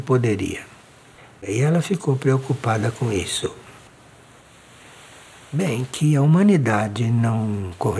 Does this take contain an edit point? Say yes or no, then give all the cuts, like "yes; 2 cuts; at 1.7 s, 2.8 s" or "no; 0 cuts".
no; 0 cuts